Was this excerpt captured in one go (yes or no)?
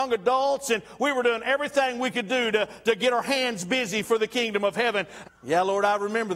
no